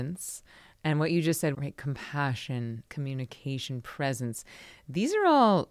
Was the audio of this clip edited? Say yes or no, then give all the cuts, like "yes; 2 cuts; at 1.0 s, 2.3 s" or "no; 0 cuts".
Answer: yes; 2 cuts; at 1.5 s, 2.9 s